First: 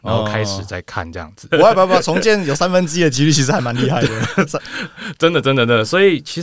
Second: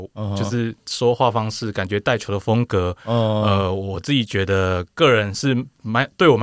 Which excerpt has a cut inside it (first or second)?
first